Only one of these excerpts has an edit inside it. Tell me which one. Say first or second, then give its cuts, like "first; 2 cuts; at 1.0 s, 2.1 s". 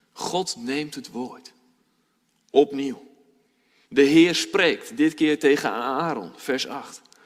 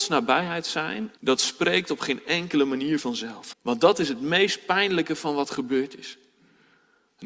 second; 2 cuts; at 1.2 s, 3.5 s